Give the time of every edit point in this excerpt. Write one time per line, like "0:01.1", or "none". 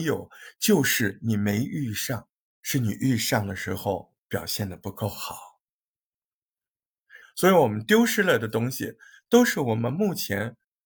0:02.6
0:07.2